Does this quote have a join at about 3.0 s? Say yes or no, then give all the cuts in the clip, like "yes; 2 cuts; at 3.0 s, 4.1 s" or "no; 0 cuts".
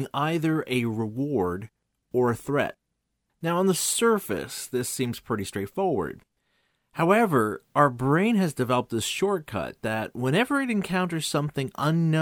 no; 0 cuts